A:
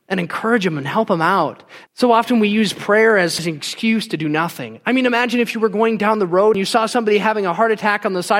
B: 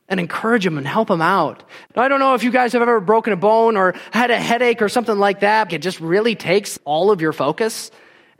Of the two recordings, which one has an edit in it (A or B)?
B